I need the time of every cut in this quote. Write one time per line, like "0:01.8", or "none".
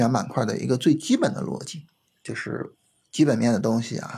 0:02.2

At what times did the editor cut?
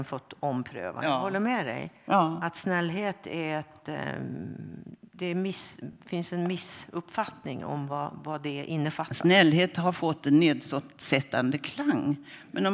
none

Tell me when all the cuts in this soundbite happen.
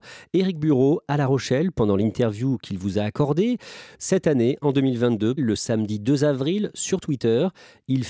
0:03.9
0:05.4

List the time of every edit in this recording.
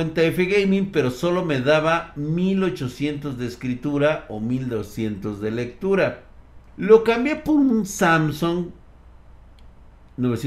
0:06.7

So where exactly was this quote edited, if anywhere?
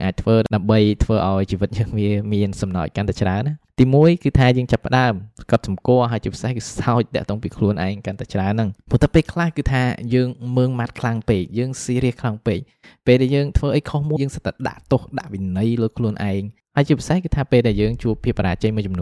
0:14.2

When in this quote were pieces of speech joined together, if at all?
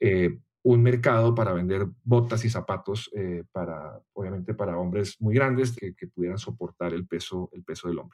0:05.8

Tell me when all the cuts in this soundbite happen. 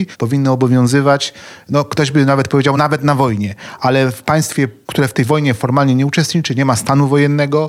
none

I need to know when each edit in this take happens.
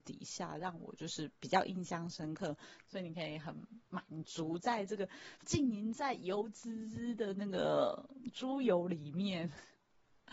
0:02.8

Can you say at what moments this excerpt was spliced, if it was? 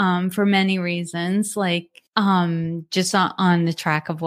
0:02.1

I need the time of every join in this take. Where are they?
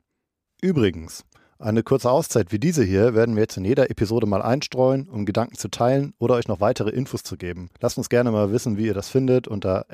0:07.7

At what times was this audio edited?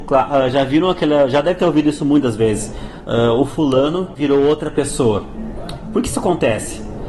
0:04.1

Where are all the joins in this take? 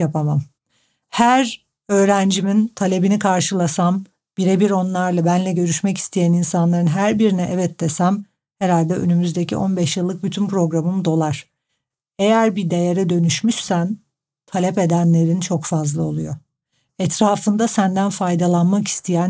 none

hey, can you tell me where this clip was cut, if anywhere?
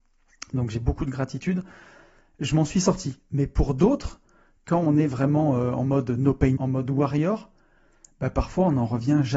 0:06.6

